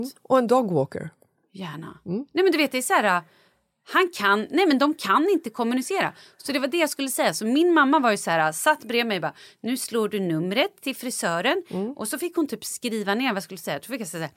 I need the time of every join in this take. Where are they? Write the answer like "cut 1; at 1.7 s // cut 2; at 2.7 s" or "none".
none